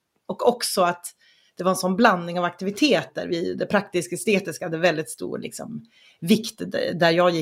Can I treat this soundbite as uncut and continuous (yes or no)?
yes